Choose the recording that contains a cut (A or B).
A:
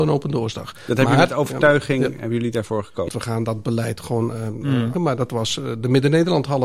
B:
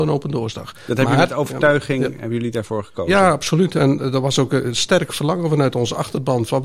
A